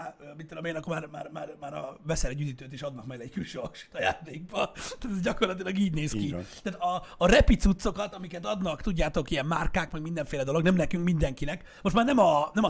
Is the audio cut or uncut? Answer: uncut